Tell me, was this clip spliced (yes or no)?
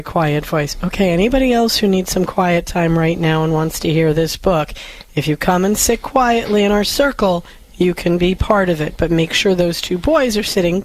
no